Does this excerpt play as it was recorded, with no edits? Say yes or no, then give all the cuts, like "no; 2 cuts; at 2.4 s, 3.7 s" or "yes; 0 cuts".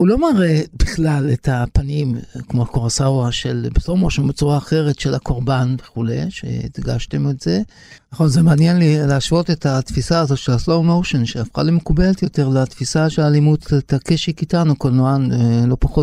no; 1 cut; at 8.0 s